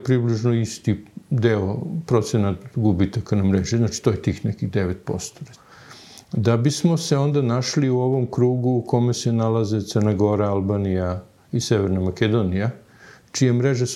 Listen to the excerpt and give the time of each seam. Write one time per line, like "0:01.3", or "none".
none